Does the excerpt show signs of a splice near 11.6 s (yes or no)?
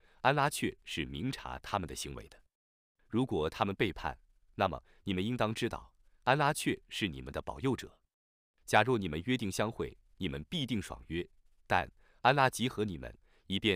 no